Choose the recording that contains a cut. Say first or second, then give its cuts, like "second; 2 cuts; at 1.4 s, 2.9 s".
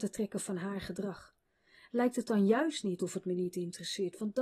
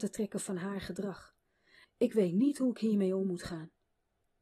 second; 1 cut; at 1.8 s